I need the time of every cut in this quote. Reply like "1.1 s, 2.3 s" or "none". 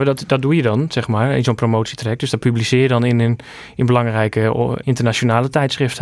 4.8 s